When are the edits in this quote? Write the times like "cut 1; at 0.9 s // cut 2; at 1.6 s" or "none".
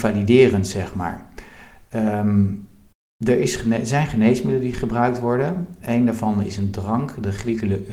none